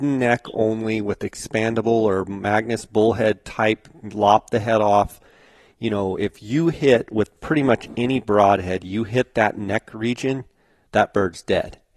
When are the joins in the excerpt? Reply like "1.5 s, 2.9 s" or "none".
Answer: none